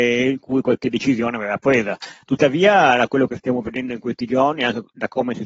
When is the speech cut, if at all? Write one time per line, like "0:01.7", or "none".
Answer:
0:02.2